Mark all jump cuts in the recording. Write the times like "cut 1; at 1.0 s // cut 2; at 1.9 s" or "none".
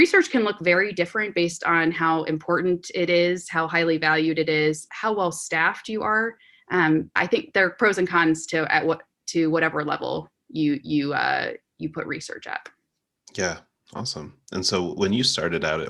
cut 1; at 7.2 s